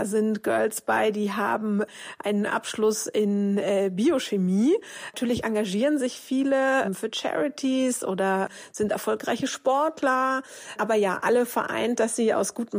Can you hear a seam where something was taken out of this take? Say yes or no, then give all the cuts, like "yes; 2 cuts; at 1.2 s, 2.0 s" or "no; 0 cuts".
no; 0 cuts